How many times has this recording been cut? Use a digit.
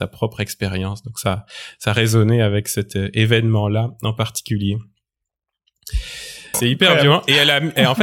1